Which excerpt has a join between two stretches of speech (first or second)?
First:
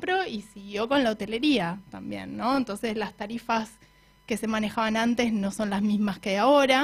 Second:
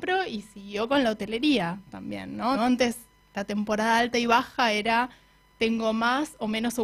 second